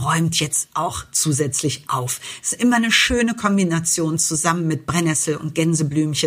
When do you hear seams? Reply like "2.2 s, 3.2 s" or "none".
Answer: none